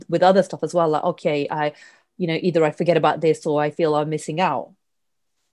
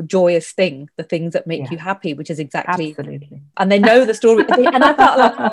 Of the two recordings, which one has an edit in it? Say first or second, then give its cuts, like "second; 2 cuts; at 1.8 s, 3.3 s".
second; 1 cut; at 3.5 s